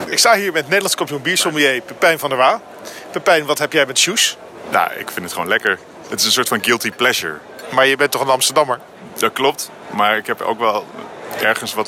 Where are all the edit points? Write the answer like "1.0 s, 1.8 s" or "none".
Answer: none